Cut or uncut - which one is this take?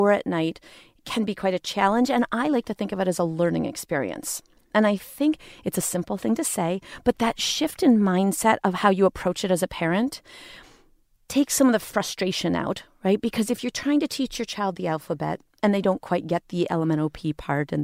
uncut